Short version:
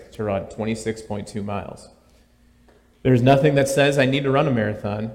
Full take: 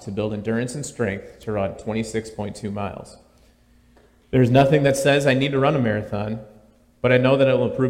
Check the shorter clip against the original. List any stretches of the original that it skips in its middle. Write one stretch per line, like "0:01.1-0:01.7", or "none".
none